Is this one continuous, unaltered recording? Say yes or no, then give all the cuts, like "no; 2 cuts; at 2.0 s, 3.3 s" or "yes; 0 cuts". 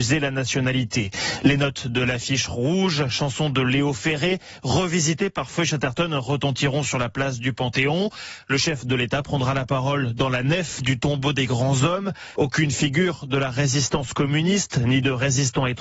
no; 1 cut; at 12.4 s